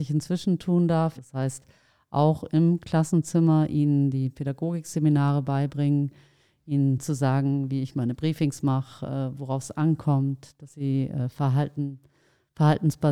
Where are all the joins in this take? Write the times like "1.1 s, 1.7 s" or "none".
1.2 s